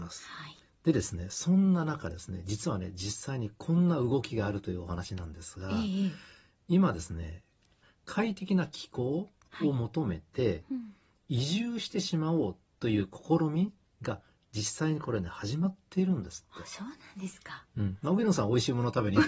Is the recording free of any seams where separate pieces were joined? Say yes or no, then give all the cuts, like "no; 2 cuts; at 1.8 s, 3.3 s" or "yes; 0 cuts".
yes; 0 cuts